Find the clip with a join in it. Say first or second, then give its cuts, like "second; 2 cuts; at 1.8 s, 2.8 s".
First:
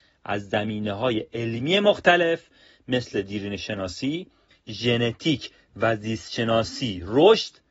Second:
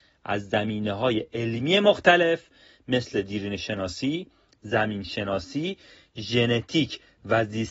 first; 1 cut; at 4.5 s